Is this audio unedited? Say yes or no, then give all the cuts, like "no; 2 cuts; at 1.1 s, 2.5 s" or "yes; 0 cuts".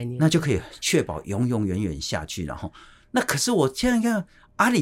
yes; 0 cuts